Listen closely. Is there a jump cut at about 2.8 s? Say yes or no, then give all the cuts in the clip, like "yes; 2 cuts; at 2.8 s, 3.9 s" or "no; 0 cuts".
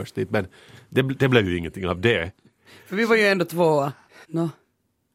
no; 1 cut; at 4.2 s